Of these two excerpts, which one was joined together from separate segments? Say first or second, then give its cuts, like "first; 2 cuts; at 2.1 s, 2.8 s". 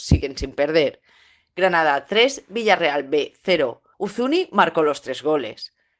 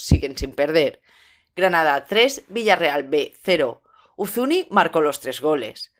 first; 1 cut; at 3.9 s